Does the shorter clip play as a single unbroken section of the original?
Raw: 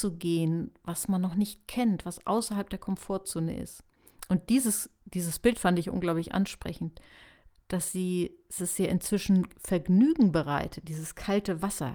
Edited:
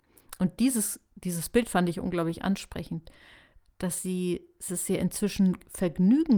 yes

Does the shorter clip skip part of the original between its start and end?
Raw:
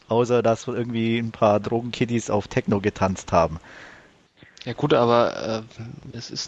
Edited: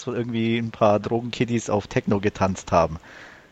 no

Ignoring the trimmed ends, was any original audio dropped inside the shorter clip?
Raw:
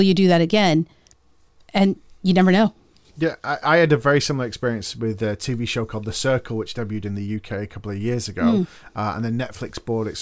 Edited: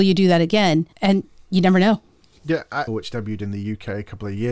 yes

